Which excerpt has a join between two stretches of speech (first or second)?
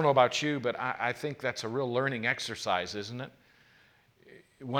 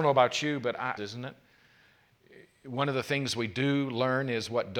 second